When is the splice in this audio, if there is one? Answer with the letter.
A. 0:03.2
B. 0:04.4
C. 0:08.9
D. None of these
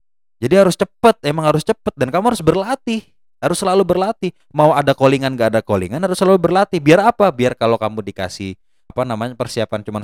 C